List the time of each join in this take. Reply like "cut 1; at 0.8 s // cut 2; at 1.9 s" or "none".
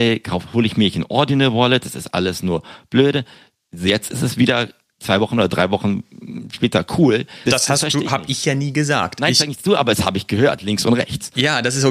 cut 1; at 7.5 s